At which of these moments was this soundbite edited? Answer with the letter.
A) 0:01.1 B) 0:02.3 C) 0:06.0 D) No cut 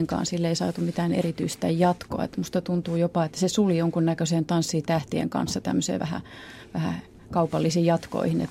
D